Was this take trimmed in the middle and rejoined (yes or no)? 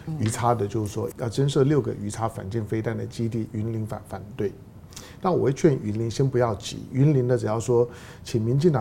yes